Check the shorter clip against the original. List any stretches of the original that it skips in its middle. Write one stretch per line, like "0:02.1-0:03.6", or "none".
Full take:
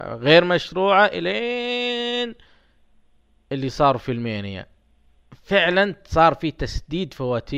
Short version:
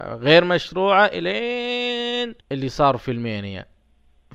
0:02.4-0:03.4